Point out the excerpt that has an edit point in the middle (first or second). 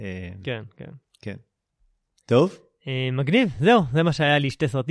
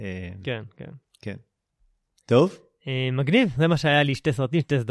second